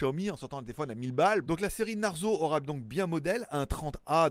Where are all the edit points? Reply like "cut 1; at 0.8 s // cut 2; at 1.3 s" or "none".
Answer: cut 1; at 1.4 s